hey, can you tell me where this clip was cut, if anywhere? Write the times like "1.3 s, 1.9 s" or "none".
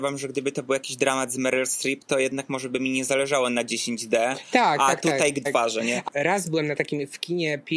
5.5 s